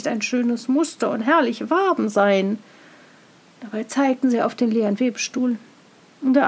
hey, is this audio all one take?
yes; 0 cuts

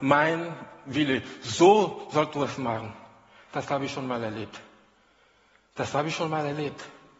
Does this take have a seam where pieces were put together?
no; 0 cuts

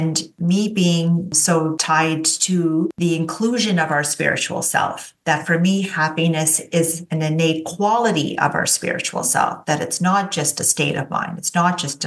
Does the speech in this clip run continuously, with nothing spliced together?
yes; 0 cuts

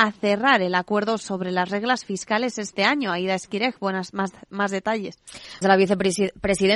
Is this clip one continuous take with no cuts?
no; 1 cut; at 5.6 s

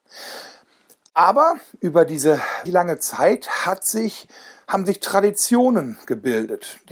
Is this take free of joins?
no; 1 cut; at 2.7 s

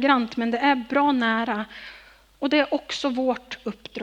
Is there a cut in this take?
no; 0 cuts

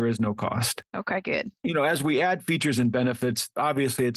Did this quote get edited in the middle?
no; 0 cuts

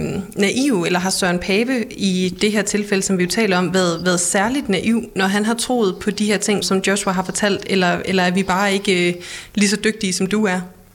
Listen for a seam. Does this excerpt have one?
yes; 1 cut; at 6.6 s

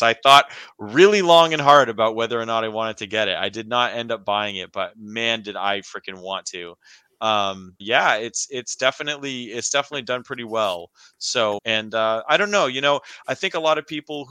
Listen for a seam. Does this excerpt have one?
yes; 2 cuts; at 7.8 s, 11.6 s

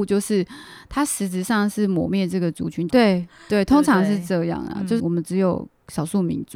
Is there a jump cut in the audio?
yes; 2 cuts; at 2.9 s, 5.0 s

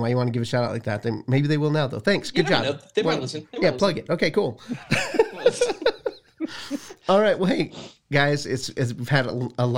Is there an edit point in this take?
no; 0 cuts

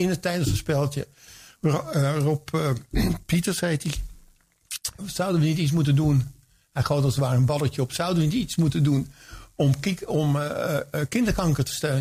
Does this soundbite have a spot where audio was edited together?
yes; 1 cut; at 5.0 s

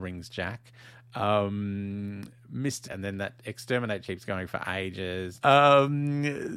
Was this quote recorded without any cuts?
no; 3 cuts; at 2.8 s, 4.0 s, 5.4 s

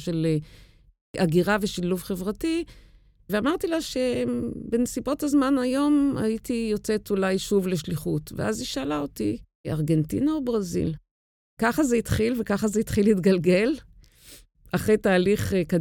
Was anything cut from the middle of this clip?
no; 0 cuts

